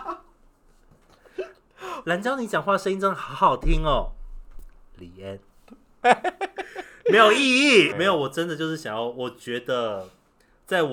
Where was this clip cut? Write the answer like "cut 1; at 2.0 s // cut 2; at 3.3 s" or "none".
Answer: cut 1; at 6.0 s // cut 2; at 7.9 s